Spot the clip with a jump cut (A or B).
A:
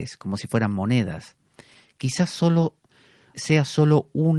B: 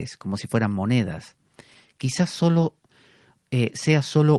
A